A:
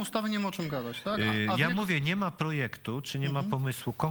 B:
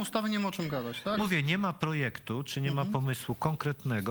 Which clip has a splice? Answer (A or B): B